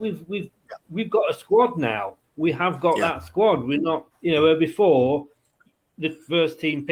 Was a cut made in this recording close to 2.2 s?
no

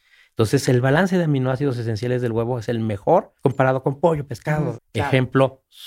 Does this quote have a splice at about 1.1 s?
no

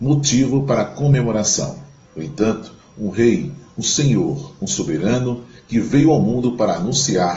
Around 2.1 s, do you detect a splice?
yes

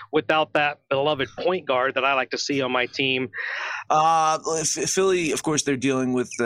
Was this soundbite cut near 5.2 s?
no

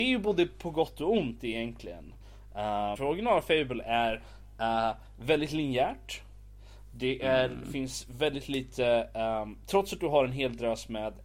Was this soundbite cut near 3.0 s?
yes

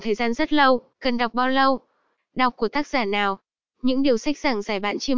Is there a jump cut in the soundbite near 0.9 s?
yes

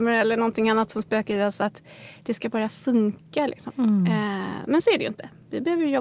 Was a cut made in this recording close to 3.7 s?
yes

